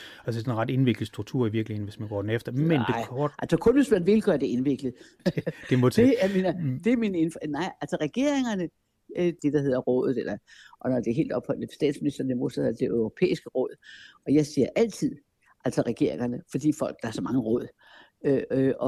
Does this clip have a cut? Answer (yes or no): yes